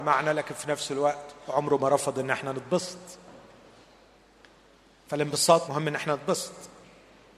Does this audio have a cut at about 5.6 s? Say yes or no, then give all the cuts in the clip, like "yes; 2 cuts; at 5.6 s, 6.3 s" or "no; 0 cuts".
yes; 1 cut; at 5.6 s